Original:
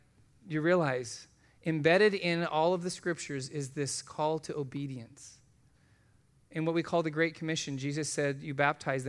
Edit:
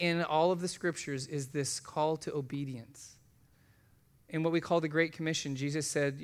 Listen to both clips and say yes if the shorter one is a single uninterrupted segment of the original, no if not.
yes